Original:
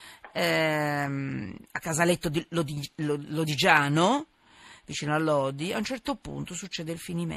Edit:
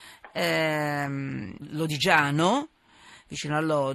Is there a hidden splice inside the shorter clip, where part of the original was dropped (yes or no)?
yes